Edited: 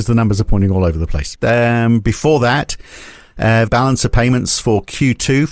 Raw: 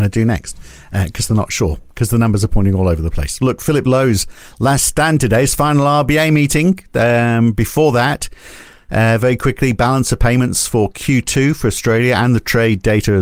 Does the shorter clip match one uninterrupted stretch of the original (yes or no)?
no